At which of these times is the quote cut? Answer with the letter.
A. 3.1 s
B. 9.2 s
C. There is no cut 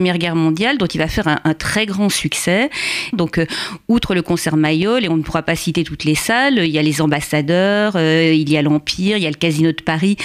A